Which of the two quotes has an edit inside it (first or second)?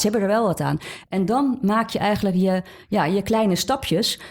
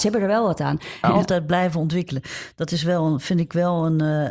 second